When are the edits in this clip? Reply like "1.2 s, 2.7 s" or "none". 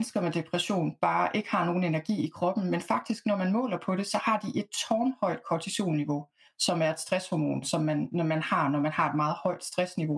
none